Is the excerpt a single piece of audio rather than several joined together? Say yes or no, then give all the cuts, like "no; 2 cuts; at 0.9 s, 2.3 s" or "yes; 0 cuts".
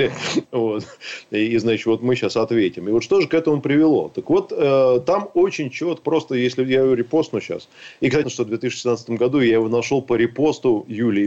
no; 2 cuts; at 6.0 s, 8.2 s